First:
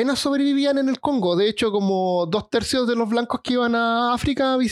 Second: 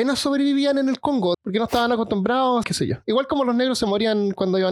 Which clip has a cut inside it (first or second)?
second